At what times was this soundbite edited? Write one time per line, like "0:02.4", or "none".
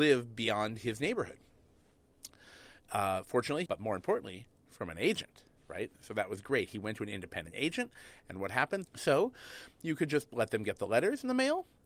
0:03.7
0:08.8

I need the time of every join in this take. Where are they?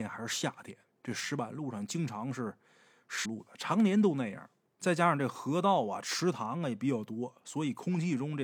0:03.2

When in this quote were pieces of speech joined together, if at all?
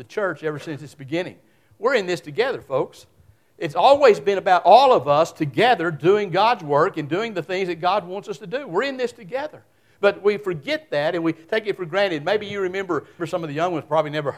0:13.2

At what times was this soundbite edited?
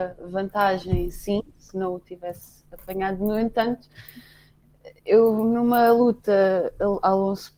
none

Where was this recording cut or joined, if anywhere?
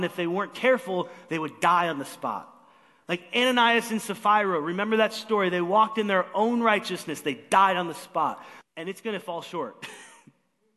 0:08.6

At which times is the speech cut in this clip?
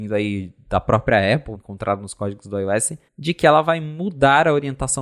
0:01.5
0:03.1

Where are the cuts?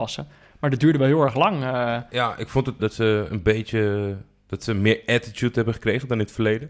0:02.8

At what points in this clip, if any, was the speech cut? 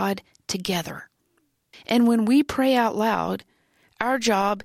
0:01.7

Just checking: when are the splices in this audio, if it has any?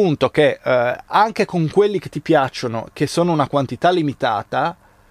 none

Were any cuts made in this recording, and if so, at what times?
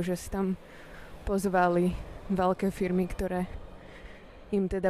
none

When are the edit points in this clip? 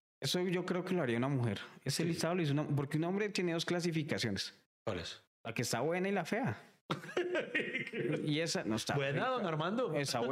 none

